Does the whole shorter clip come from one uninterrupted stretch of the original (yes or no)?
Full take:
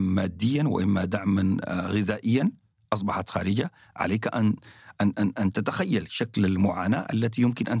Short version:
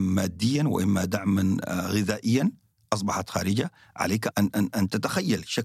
no